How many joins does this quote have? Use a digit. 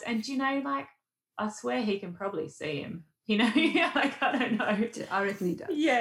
0